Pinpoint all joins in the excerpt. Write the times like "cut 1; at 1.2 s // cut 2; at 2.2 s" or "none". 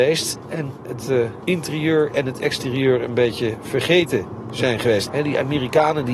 cut 1; at 5.1 s